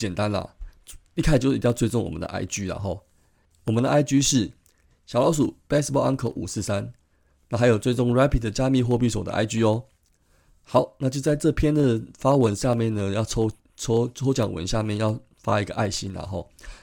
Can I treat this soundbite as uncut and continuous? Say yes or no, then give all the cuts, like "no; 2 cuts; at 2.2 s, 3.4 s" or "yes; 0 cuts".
yes; 0 cuts